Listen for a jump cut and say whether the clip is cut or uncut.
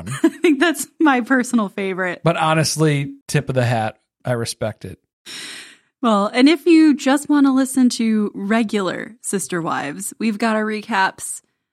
cut